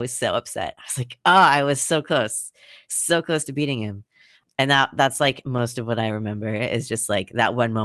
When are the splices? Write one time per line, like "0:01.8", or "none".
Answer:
none